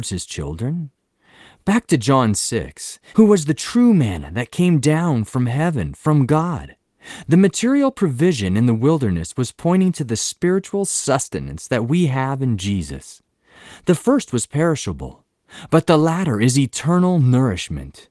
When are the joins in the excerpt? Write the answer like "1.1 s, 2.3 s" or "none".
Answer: 3.1 s